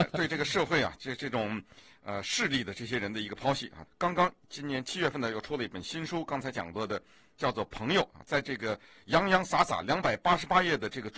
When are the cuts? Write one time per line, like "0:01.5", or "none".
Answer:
0:03.9